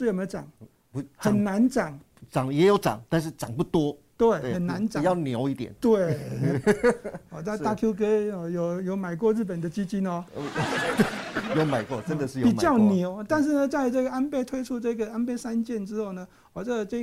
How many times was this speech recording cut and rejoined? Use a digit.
0